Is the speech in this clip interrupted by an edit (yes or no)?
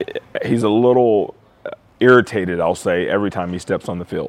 no